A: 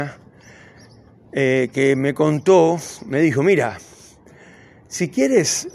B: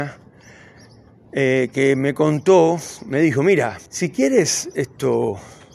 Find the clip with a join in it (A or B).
B